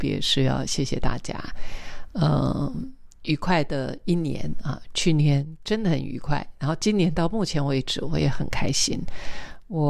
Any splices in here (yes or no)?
no